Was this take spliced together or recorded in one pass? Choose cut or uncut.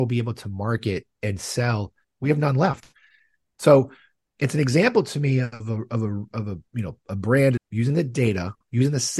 cut